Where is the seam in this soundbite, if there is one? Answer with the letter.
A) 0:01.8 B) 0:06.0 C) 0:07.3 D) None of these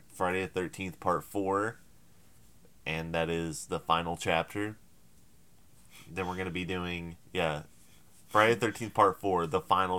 C